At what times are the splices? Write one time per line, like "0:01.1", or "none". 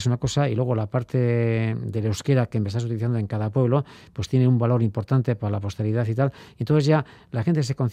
none